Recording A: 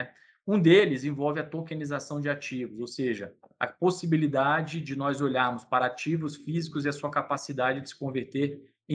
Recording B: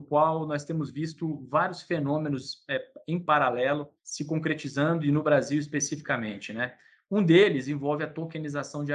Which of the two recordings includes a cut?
B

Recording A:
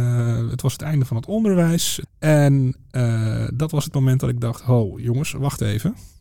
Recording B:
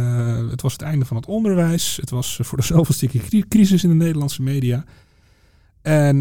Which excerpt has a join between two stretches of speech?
A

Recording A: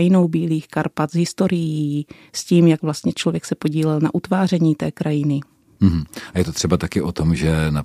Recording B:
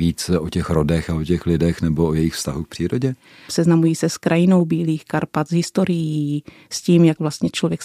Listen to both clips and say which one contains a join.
B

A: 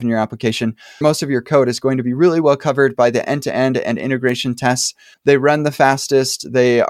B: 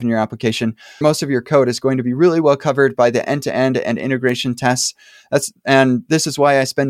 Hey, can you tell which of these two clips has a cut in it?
A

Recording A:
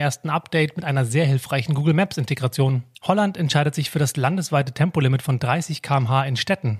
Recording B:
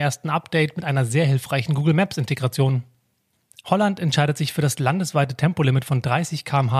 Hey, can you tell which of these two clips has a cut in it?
A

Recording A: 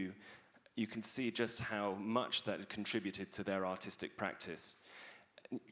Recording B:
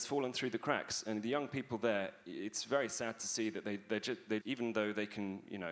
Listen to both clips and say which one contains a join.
B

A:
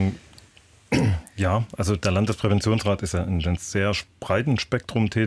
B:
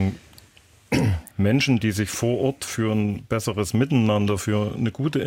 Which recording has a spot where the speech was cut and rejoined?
B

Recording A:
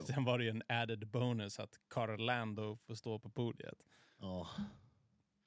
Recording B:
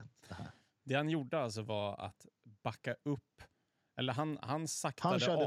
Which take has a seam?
A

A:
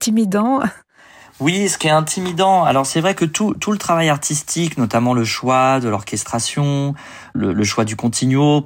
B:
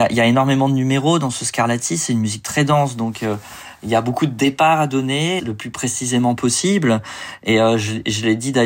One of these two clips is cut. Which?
B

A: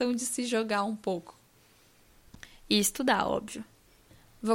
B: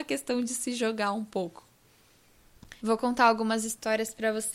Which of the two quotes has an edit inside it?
B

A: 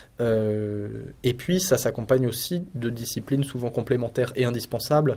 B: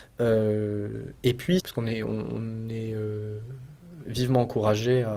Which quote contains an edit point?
B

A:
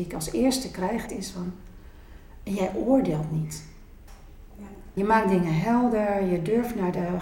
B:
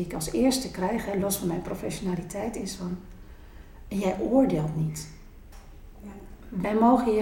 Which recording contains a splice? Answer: A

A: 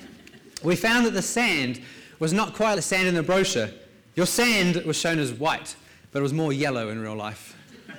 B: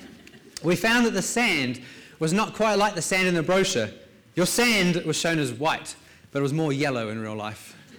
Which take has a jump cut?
A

